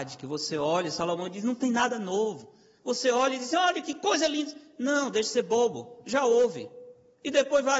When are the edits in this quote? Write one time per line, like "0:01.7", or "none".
none